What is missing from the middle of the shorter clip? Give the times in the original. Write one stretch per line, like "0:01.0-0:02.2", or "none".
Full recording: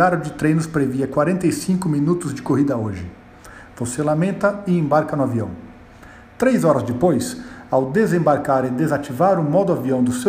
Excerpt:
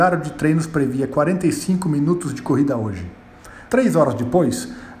0:03.7-0:06.4